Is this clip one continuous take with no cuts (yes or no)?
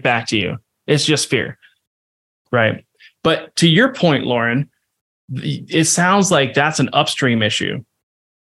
yes